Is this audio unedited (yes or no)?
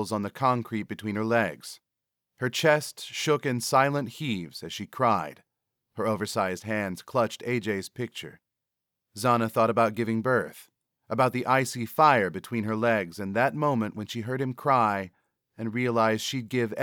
no